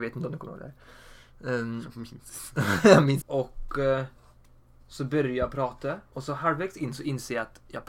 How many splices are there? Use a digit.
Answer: 2